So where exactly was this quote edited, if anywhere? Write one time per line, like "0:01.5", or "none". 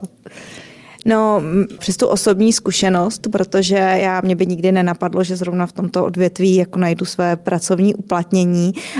0:01.8